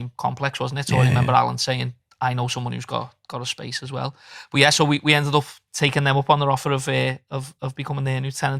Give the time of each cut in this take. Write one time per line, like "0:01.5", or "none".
none